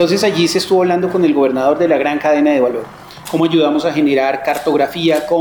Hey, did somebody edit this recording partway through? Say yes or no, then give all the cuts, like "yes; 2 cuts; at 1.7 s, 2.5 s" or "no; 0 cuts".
no; 0 cuts